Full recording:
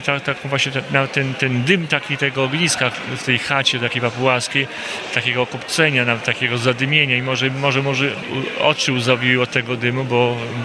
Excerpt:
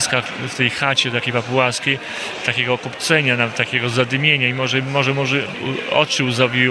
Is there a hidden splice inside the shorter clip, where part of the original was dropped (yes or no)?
no